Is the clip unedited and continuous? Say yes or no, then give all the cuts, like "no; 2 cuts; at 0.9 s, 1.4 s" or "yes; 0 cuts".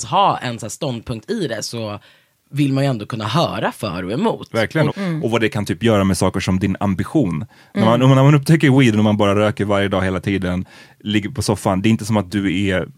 no; 1 cut; at 4.9 s